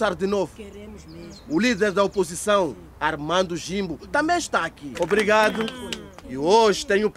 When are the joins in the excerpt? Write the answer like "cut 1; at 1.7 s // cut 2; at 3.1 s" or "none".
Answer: cut 1; at 5.0 s // cut 2; at 6.2 s